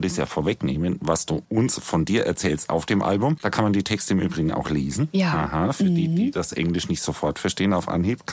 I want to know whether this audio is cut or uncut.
cut